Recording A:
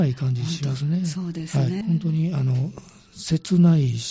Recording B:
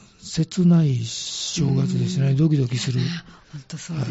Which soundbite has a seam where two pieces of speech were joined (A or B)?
A